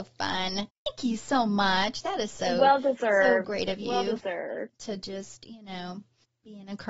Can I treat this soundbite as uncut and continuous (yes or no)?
yes